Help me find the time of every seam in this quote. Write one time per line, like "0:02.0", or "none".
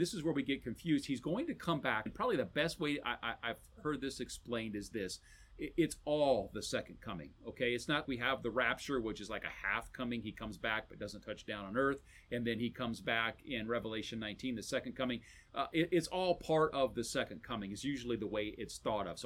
0:02.1
0:08.0